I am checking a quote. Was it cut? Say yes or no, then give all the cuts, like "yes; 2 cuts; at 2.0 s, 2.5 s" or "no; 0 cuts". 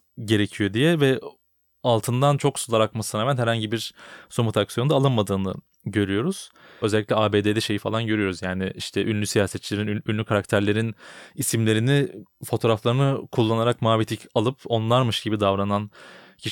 yes; 1 cut; at 6.8 s